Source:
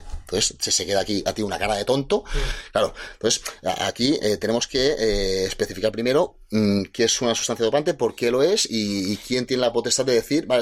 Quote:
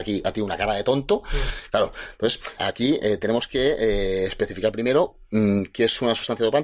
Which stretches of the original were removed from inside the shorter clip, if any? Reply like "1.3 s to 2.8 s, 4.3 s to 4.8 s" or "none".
3.6 s to 3.8 s